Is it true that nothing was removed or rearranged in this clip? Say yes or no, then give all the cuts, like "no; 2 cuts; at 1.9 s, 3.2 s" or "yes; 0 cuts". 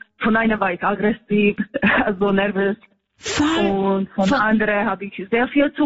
yes; 0 cuts